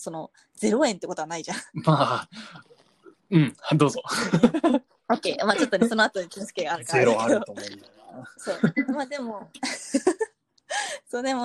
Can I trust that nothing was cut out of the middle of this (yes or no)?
no